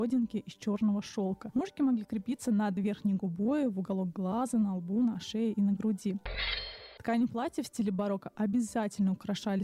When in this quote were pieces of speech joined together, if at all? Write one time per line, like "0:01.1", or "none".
none